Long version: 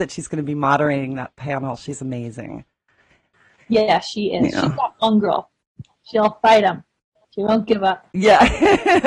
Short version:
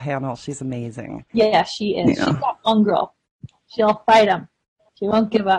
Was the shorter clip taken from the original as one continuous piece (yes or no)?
no